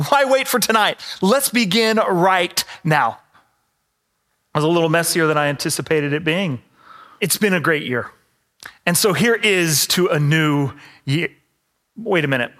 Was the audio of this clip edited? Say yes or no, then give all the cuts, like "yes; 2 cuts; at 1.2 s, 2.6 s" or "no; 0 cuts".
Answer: yes; 2 cuts; at 3.3 s, 7.2 s